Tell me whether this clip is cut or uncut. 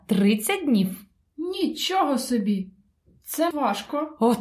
cut